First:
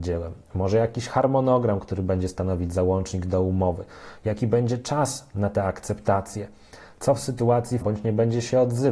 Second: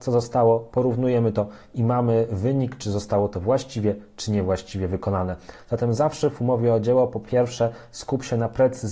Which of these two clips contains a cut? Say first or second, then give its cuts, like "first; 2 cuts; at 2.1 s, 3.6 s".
first; 2 cuts; at 4.2 s, 7.8 s